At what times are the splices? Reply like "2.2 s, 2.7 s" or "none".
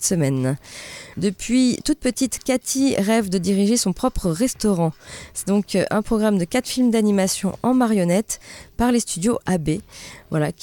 1.1 s, 5.3 s